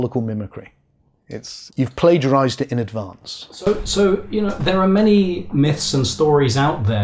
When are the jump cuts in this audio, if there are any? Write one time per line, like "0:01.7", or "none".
0:01.7